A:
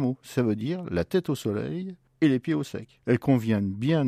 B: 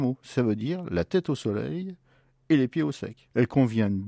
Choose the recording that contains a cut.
A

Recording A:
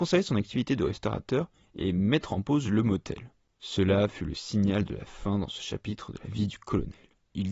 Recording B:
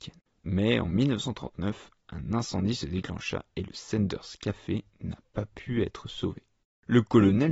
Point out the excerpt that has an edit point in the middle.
A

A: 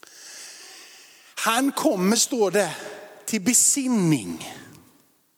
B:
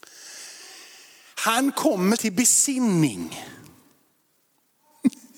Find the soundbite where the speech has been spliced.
B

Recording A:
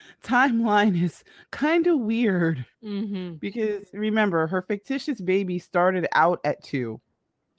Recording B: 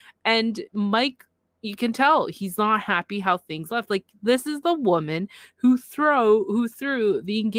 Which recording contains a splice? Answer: A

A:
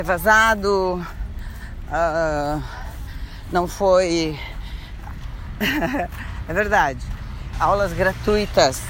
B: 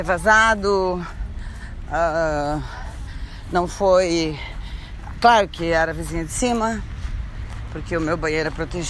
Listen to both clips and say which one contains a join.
A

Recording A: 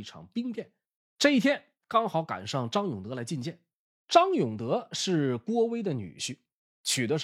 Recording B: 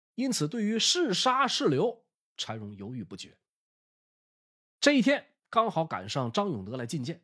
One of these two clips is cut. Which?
A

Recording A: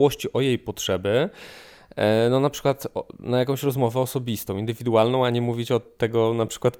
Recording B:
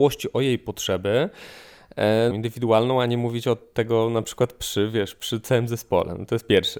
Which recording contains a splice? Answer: B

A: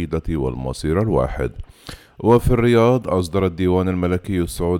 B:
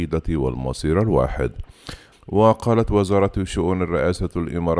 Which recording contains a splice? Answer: B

